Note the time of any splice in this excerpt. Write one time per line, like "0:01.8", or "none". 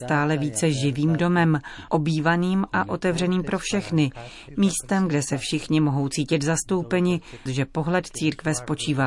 0:04.5
0:07.5